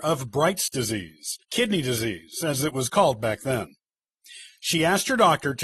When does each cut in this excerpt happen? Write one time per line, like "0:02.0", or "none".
0:01.4